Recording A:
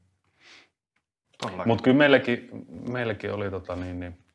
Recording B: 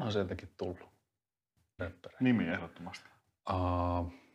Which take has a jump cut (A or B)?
B